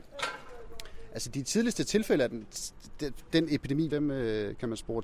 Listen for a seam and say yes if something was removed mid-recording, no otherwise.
yes